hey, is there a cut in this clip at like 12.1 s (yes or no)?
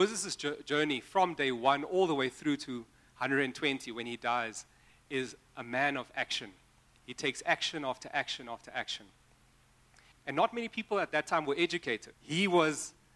yes